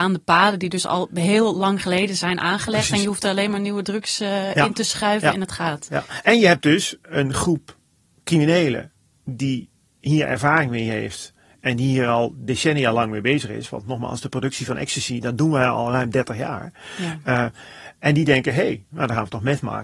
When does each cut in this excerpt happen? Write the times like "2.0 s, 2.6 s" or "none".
18.9 s